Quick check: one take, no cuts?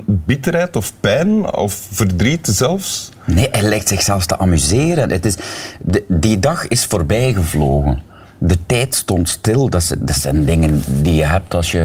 yes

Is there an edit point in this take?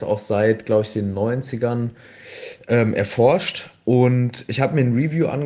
no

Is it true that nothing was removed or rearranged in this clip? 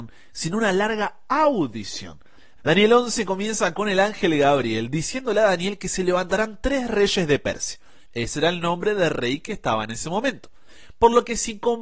no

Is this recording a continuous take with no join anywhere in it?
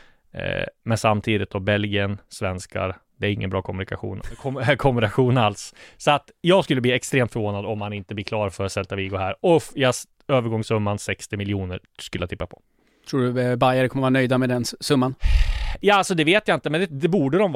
yes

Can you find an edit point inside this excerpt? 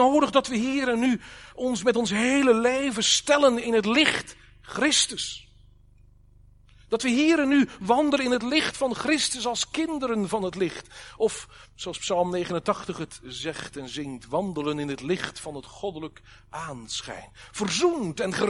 no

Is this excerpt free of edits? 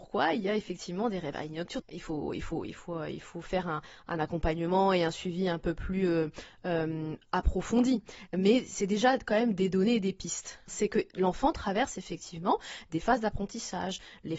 no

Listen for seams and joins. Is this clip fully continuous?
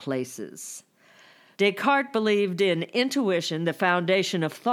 no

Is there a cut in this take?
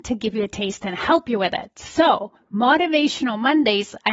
no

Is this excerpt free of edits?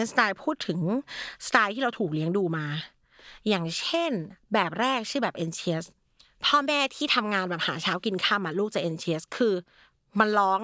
yes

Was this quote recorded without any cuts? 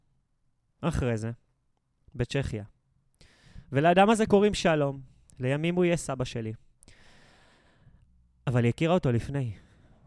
yes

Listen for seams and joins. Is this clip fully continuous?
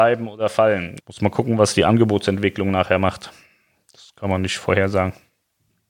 no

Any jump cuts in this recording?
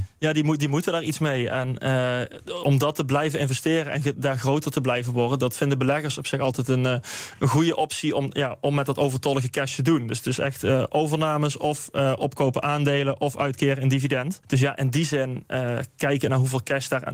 no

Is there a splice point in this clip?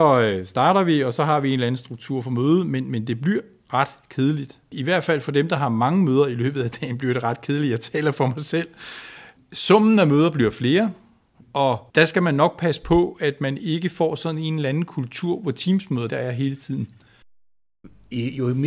yes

